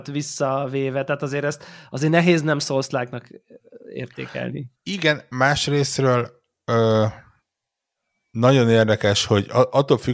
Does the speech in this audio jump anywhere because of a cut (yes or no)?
no